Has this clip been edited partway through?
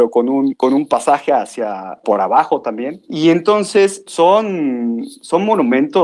yes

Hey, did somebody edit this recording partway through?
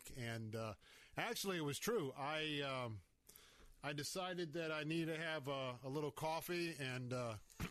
no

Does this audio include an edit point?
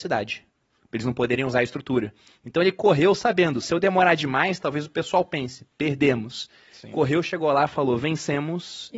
no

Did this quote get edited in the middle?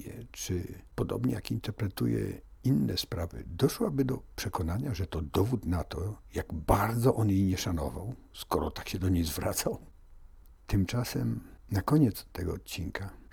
no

